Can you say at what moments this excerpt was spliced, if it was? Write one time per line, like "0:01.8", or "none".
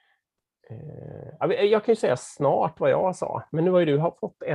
none